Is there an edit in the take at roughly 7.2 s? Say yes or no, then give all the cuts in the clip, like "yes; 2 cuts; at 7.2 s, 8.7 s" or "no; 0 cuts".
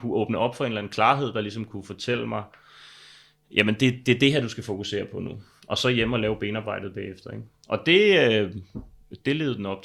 no; 0 cuts